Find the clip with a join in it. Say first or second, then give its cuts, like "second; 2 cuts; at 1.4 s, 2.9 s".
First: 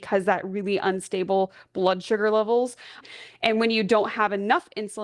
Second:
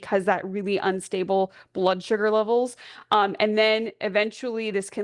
first; 1 cut; at 3.0 s